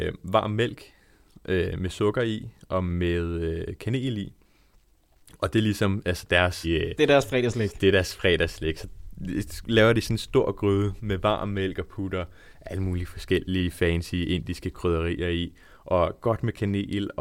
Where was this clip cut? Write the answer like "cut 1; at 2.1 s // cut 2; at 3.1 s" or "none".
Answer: cut 1; at 6.6 s